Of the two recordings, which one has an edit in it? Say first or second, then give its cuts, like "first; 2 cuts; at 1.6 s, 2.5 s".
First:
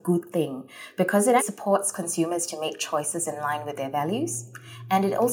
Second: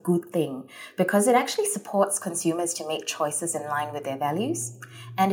first; 1 cut; at 1.4 s